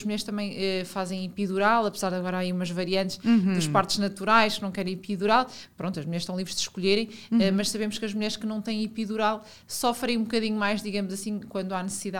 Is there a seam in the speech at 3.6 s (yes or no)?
no